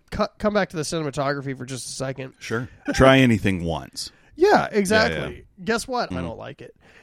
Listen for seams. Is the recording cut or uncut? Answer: cut